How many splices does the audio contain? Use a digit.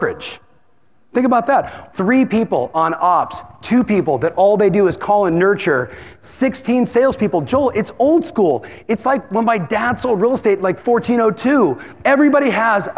2